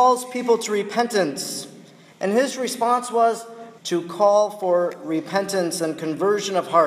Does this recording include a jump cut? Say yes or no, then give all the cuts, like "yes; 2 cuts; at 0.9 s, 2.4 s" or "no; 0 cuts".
yes; 2 cuts; at 2.1 s, 3.8 s